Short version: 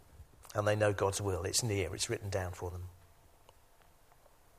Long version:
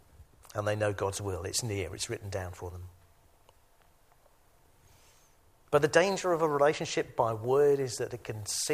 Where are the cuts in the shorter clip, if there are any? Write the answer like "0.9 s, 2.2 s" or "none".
none